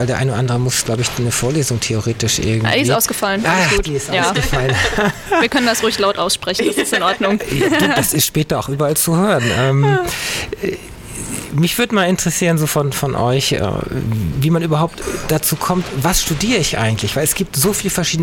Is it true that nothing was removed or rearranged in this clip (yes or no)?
no